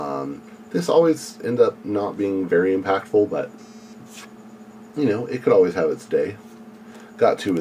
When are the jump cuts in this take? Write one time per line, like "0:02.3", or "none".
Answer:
none